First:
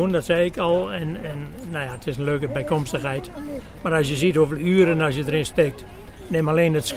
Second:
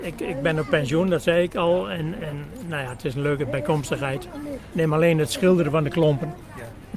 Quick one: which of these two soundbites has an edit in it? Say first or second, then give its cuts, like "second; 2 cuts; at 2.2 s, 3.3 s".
second; 1 cut; at 4.7 s